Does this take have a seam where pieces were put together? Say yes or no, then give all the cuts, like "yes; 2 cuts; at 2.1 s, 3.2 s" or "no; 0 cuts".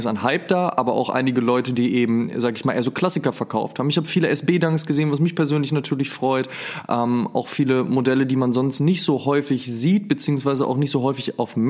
no; 0 cuts